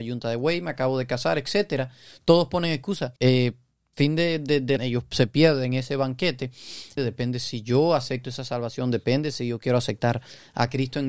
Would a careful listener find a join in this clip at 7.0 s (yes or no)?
yes